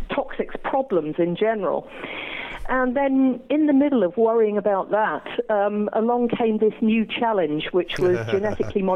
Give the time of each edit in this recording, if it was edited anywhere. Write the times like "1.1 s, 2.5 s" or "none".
none

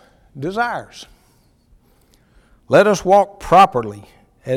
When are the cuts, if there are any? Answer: 2.5 s

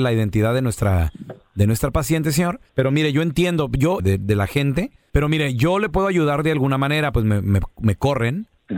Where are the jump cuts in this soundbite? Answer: 2.7 s, 4.0 s, 7.1 s

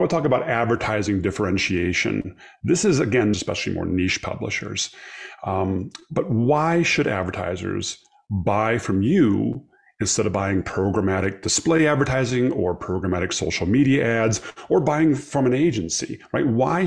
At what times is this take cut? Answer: 3.3 s

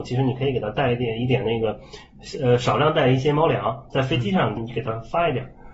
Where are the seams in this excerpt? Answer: 4.6 s

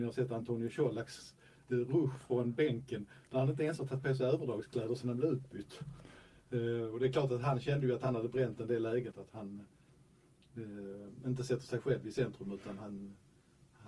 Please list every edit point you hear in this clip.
9.1 s

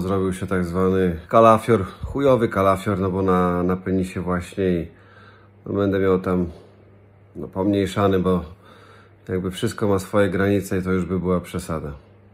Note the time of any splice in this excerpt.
1.3 s

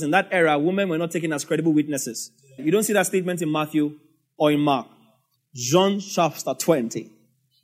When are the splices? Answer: 2.6 s, 5.3 s

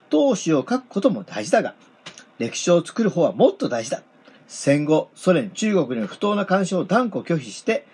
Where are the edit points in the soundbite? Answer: 4.4 s

